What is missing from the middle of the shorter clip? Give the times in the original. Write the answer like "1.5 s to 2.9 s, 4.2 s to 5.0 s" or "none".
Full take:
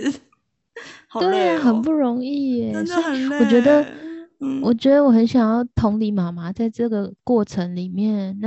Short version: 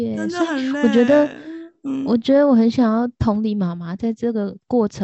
none